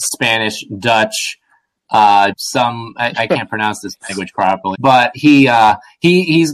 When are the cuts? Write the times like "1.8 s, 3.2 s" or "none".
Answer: 2.4 s, 4.7 s